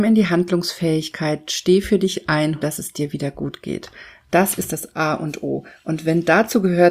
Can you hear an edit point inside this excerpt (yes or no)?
yes